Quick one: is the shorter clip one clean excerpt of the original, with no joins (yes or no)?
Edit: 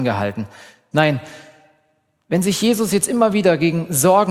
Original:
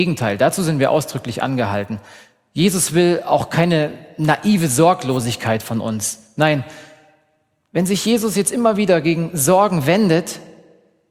no